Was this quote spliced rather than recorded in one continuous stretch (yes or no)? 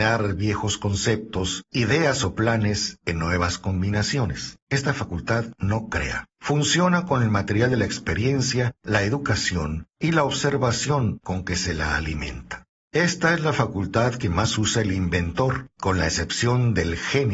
no